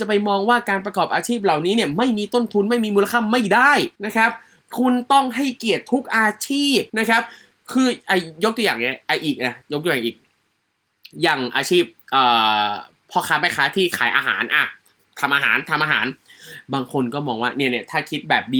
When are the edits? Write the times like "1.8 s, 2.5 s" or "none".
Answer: 4.0 s, 6.9 s